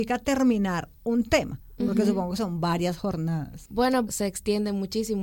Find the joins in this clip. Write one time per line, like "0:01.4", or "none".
0:04.1